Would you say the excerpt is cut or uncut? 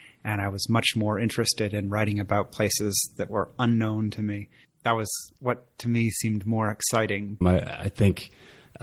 cut